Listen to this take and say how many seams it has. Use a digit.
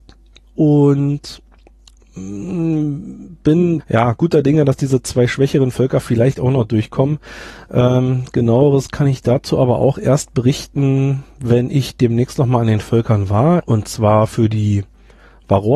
2